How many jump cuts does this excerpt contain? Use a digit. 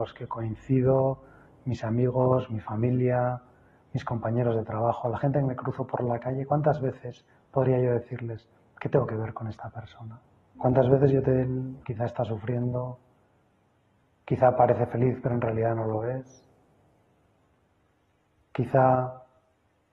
2